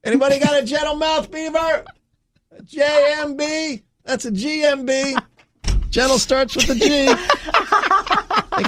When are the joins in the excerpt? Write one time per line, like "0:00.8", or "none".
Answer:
none

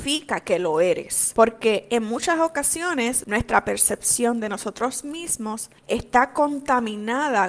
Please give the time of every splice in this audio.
0:05.8

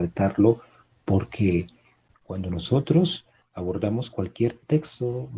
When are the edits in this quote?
none

